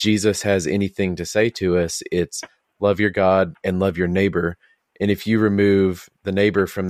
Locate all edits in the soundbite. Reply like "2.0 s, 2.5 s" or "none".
none